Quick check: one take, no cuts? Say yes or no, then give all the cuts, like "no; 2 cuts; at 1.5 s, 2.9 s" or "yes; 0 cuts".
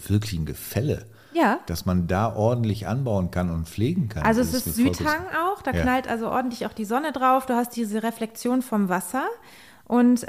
yes; 0 cuts